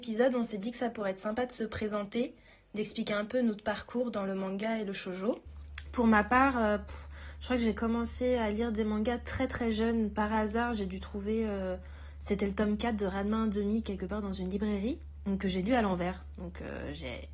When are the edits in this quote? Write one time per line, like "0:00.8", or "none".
none